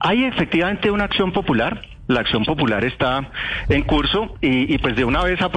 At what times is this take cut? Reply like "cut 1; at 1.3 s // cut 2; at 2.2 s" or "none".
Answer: none

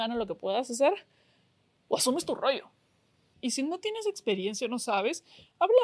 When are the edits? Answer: cut 1; at 3.3 s

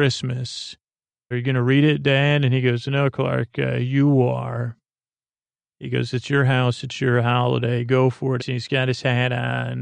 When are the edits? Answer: cut 1; at 1.3 s // cut 2; at 8.4 s

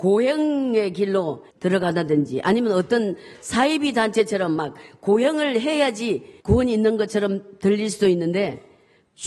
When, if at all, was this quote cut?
cut 1; at 1.5 s // cut 2; at 6.4 s

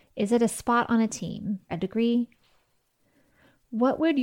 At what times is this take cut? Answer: cut 1; at 1.7 s

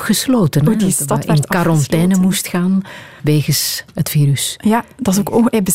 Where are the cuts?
cut 1; at 3.2 s

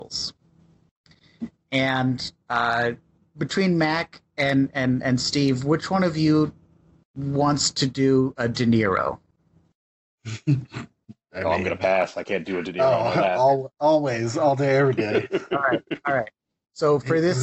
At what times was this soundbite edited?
none

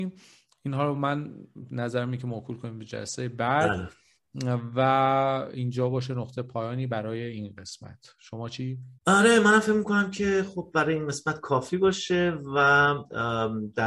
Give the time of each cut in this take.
cut 1; at 9.0 s

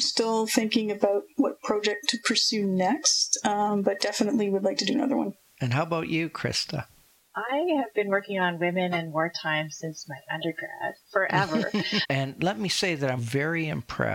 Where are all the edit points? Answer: cut 1; at 5.5 s // cut 2; at 12.0 s // cut 3; at 13.2 s

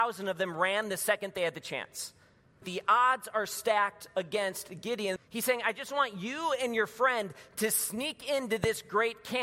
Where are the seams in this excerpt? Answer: cut 1; at 2.6 s // cut 2; at 5.2 s

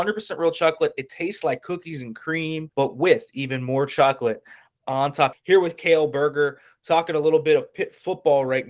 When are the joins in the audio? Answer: cut 1; at 2.7 s // cut 2; at 5.3 s

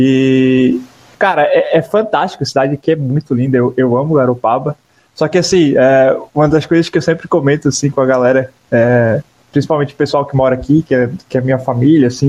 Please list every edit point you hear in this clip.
none

